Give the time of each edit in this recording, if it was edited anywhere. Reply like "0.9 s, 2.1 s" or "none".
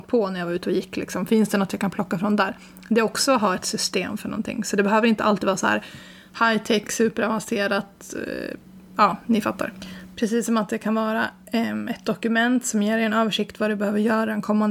none